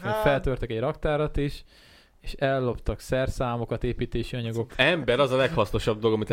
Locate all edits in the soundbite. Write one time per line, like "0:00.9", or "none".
0:04.7